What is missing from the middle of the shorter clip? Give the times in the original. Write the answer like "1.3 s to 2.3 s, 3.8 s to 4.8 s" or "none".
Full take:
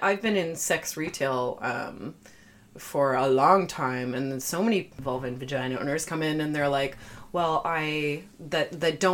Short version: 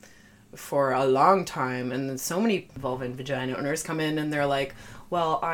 none

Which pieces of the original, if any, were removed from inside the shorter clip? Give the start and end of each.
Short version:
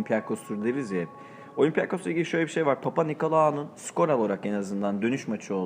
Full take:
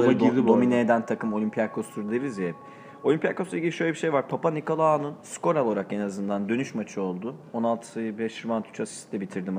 none

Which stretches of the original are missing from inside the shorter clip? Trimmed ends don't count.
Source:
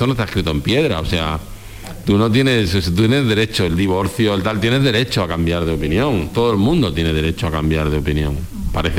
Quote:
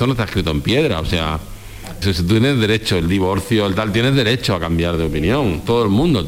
2.0 s to 2.7 s

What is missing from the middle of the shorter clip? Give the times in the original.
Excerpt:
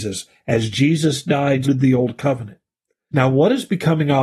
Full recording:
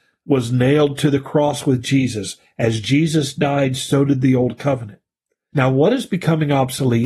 3.8 s to 4.1 s

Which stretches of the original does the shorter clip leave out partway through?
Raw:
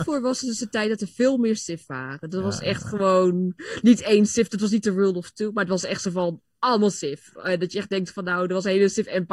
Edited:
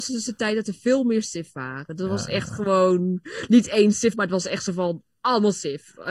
4.5 s to 5.5 s

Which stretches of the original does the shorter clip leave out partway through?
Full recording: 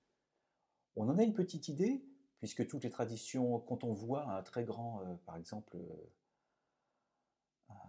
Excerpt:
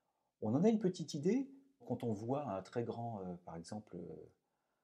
2.3 s to 3.6 s

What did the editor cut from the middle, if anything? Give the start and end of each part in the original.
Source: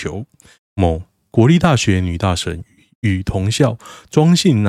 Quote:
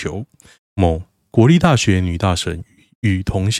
none

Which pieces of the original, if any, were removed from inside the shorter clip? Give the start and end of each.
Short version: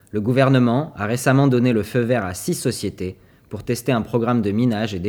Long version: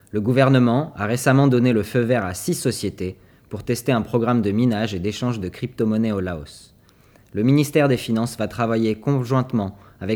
none

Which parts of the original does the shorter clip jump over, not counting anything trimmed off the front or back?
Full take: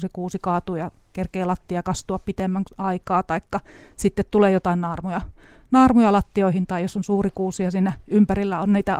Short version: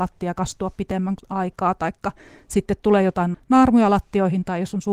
4.8 s to 5.6 s

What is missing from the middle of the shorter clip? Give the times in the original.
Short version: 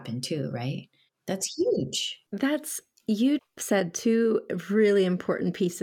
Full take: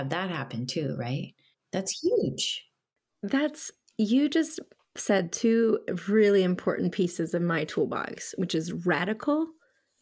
2.7 s to 3.2 s, 4.3 s to 4.8 s

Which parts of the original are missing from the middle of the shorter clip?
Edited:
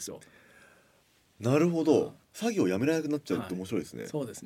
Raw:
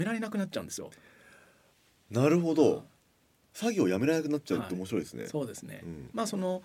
2.9 s to 3.4 s

